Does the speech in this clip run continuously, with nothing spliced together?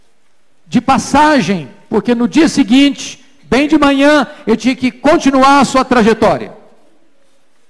yes; 0 cuts

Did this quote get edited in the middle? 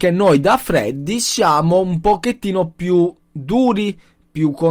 no; 0 cuts

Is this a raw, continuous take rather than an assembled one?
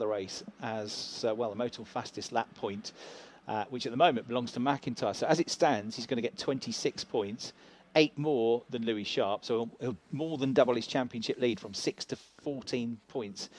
yes; 0 cuts

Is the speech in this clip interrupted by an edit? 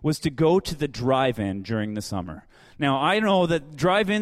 no; 0 cuts

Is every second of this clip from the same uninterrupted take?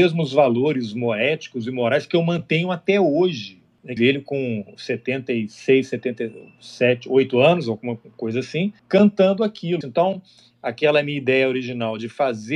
no; 2 cuts; at 4.0 s, 9.8 s

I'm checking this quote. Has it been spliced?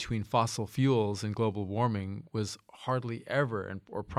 no; 0 cuts

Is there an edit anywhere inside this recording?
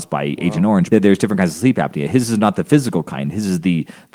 yes; 1 cut; at 0.9 s

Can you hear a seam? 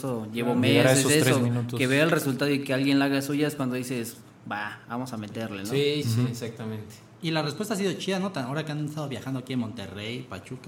yes; 1 cut; at 6.0 s

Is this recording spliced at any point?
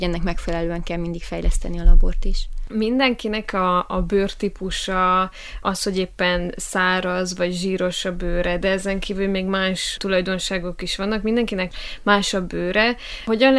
no; 0 cuts

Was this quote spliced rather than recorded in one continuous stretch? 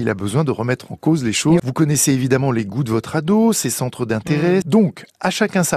yes; 2 cuts; at 1.6 s, 4.6 s

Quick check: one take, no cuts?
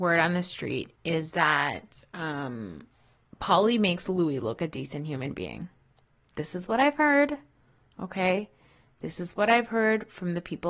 no; 1 cut; at 4.6 s

